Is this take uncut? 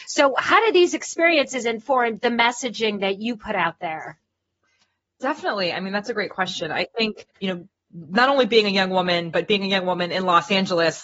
no; 1 cut; at 7.3 s

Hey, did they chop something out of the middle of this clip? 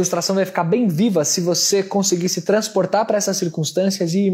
no; 0 cuts

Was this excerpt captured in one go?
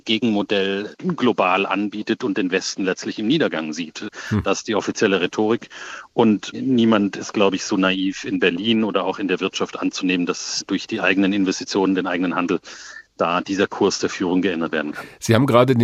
yes; 0 cuts

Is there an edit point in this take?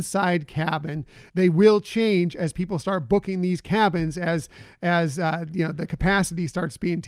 yes; 1 cut; at 1.3 s

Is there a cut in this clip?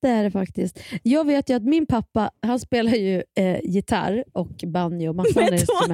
no; 0 cuts

